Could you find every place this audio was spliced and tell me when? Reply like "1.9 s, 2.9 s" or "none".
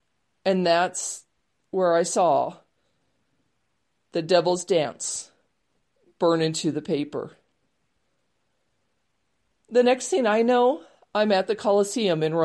none